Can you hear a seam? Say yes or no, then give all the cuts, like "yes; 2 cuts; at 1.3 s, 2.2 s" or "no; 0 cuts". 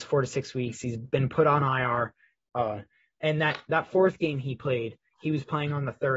no; 0 cuts